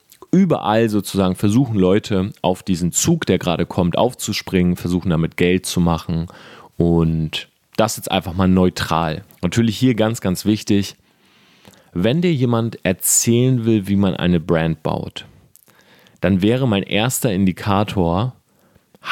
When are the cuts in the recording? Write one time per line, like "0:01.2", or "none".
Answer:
0:09.3